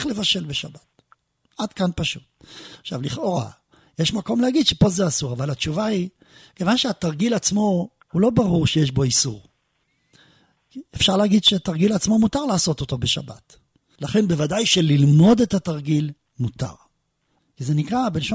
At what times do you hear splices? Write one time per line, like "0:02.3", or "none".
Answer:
0:14.0
0:17.4